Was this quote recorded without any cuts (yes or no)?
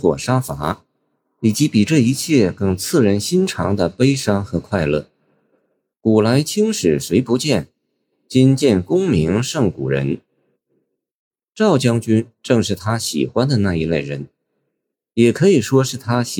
no